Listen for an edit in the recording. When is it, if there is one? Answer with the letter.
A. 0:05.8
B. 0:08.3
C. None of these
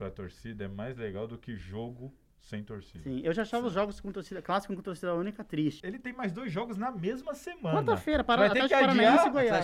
A